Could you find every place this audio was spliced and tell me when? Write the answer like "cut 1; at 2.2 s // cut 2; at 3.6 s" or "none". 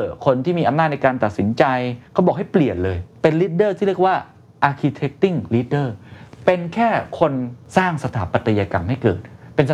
cut 1; at 2.1 s